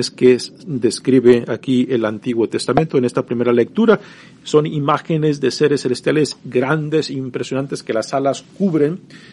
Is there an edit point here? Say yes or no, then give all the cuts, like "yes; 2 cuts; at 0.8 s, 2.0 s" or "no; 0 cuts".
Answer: no; 0 cuts